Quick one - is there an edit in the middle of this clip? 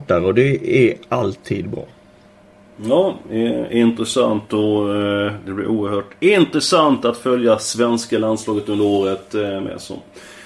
no; 0 cuts

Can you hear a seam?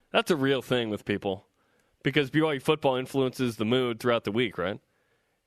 no; 0 cuts

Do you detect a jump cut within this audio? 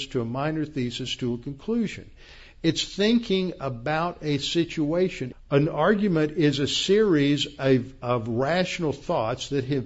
yes; 1 cut; at 5.3 s

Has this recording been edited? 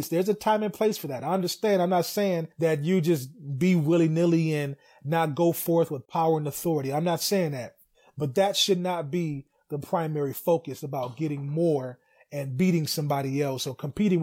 no; 0 cuts

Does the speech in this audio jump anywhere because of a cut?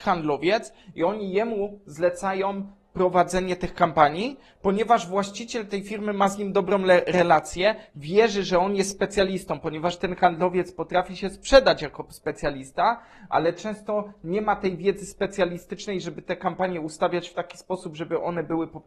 no; 0 cuts

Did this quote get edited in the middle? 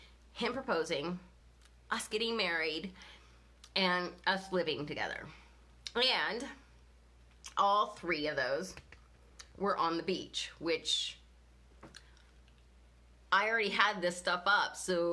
no; 0 cuts

